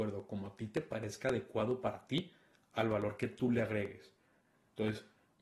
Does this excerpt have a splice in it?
no; 0 cuts

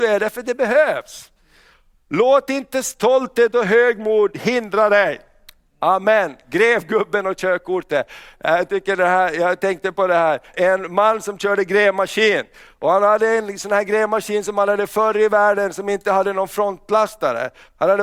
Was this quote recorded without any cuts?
no; 1 cut; at 10.5 s

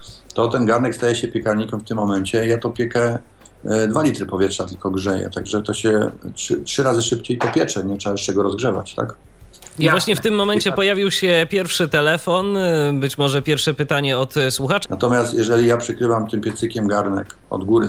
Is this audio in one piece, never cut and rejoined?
no; 1 cut; at 14.8 s

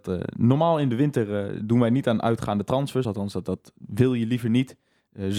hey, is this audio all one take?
yes; 0 cuts

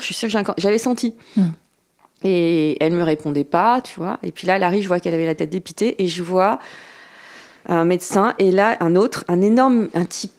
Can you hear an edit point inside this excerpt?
no; 0 cuts

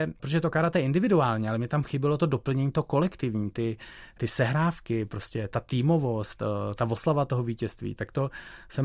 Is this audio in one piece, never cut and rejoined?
yes; 0 cuts

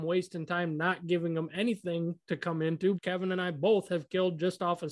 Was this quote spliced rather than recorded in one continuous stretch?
yes; 1 cut; at 2.9 s

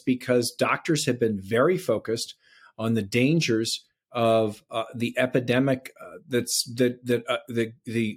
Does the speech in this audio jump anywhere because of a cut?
no; 0 cuts

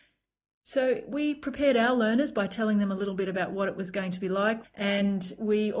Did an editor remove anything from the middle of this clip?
yes; 1 cut; at 4.6 s

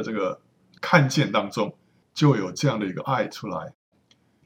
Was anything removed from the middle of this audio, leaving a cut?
yes; 1 cut; at 2.0 s

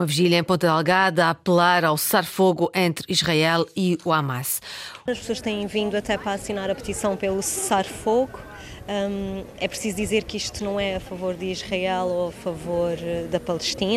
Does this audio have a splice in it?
yes; 1 cut; at 5.1 s

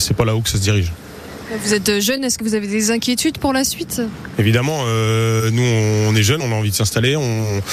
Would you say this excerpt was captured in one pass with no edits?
yes; 0 cuts

